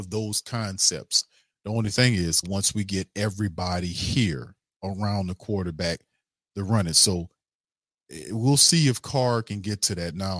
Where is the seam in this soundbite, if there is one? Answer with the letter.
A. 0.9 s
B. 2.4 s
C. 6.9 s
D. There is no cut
B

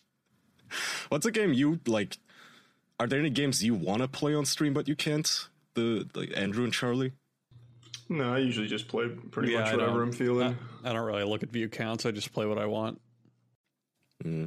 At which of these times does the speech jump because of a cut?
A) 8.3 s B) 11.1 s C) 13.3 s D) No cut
D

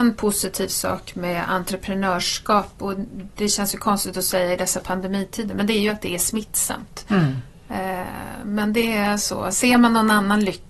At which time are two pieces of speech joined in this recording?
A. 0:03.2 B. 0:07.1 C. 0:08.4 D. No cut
D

